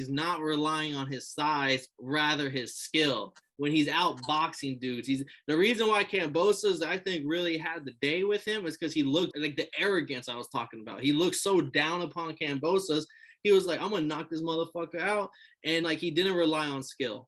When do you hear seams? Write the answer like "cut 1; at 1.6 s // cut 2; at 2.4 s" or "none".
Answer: cut 1; at 9.3 s // cut 2; at 15.8 s